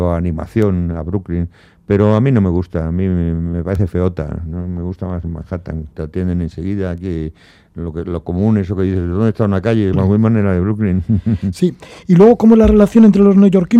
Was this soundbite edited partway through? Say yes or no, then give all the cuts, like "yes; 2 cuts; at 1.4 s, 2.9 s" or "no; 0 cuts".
yes; 2 cuts; at 5.9 s, 9.9 s